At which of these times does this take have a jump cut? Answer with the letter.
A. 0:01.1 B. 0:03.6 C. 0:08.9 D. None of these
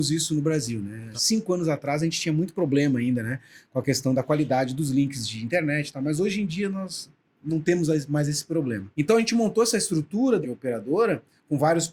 D